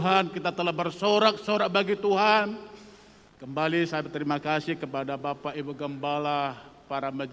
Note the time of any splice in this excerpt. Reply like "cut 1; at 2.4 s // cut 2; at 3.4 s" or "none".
cut 1; at 3.3 s